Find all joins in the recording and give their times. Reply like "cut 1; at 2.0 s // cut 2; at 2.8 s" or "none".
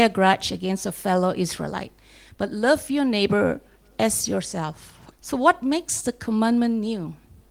cut 1; at 5.1 s